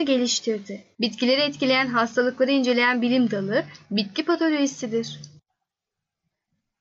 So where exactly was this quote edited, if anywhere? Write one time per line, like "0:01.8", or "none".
0:00.9